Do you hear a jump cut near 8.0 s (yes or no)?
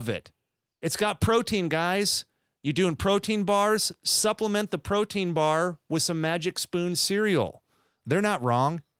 yes